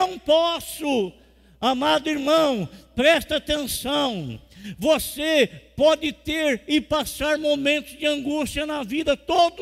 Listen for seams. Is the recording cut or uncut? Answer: uncut